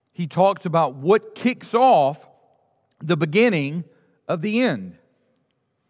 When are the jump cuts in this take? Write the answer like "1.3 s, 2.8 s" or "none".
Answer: none